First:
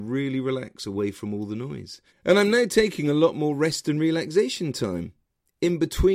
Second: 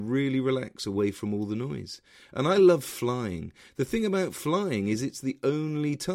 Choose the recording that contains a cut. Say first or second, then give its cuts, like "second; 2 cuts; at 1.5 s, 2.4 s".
first; 1 cut; at 2.1 s